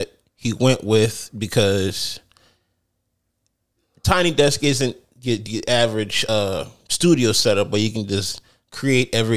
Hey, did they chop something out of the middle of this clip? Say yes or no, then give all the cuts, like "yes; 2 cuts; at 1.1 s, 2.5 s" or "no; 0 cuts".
no; 0 cuts